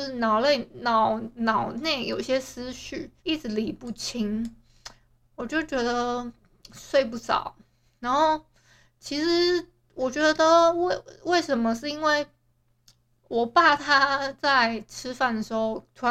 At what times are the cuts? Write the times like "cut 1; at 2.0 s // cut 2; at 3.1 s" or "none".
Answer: cut 1; at 3.2 s